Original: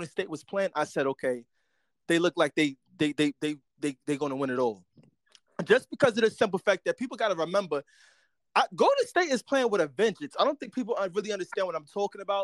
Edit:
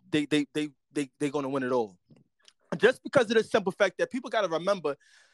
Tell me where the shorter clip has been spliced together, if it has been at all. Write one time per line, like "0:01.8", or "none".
none